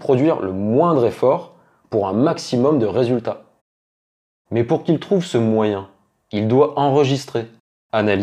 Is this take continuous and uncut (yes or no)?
yes